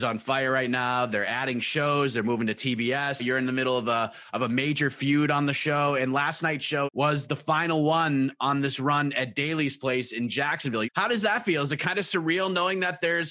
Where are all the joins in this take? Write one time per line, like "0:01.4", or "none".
0:03.2
0:06.9
0:10.8